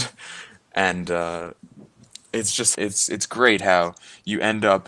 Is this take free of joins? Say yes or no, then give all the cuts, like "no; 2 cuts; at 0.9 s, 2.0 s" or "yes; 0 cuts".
no; 1 cut; at 2.7 s